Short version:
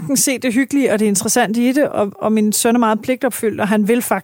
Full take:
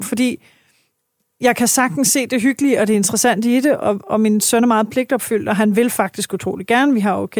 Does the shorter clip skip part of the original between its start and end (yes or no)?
no